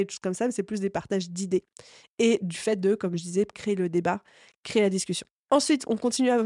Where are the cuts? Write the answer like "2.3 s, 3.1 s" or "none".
none